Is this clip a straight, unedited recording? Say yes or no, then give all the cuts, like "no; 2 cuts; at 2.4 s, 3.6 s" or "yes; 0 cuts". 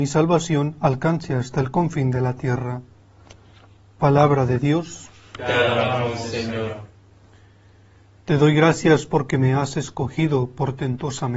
yes; 0 cuts